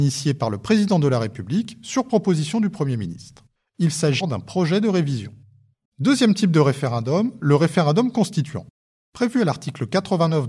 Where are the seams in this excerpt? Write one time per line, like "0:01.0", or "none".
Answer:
0:04.2
0:05.9